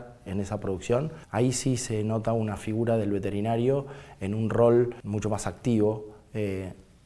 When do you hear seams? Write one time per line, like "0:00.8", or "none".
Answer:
none